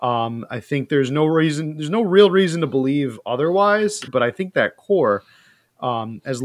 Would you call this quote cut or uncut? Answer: cut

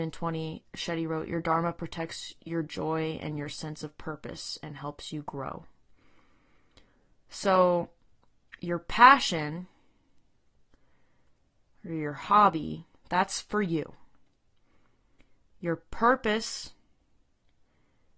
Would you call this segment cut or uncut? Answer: uncut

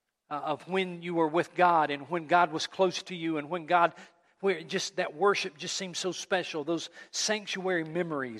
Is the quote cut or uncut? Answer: uncut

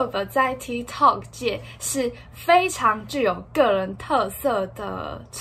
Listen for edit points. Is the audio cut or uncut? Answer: uncut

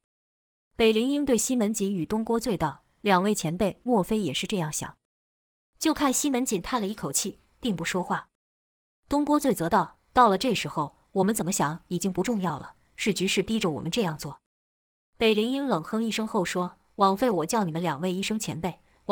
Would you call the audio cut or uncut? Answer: cut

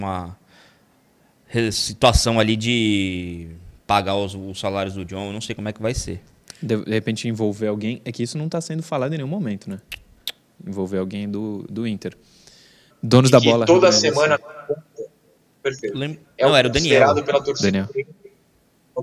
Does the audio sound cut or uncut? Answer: cut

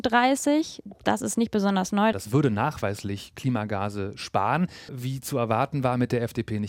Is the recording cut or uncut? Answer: cut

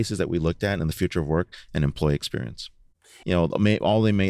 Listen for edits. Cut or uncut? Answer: cut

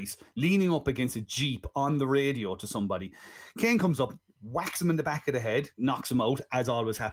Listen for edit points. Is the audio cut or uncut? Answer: cut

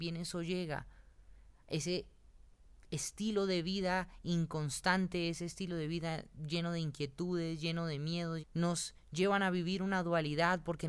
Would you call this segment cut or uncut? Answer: cut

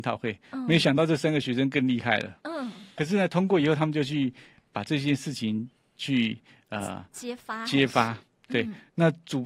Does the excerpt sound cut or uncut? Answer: cut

